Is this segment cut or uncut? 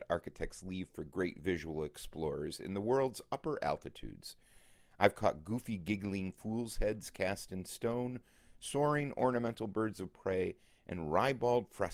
uncut